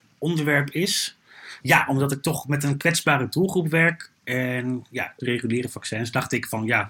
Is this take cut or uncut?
cut